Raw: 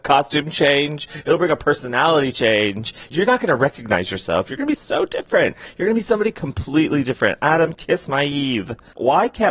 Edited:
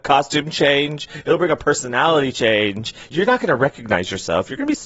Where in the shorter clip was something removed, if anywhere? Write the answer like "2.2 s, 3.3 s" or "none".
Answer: none